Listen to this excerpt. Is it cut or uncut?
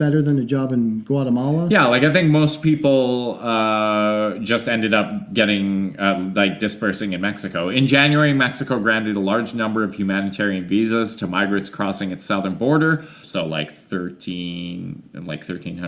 cut